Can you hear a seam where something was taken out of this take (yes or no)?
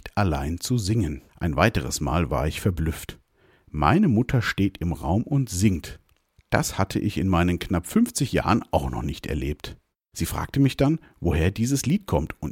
yes